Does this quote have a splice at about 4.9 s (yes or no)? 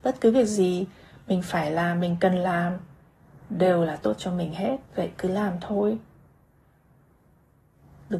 yes